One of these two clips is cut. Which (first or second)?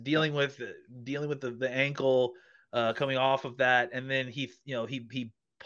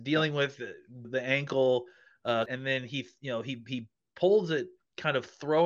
second